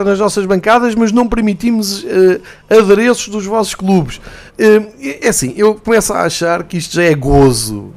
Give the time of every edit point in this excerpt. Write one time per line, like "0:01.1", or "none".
0:04.5